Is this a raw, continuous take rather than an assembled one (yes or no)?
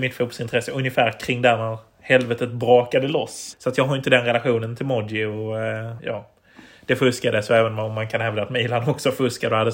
no